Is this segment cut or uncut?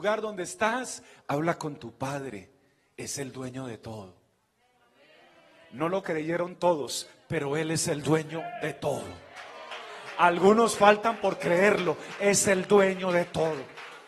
uncut